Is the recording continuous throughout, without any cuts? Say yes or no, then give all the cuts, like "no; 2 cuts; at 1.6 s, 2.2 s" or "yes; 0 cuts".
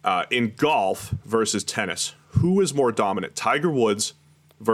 yes; 0 cuts